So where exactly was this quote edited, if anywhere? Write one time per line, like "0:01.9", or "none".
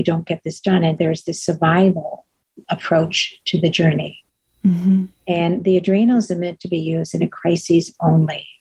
0:01.0